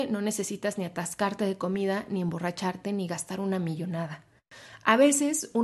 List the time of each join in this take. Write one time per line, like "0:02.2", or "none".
none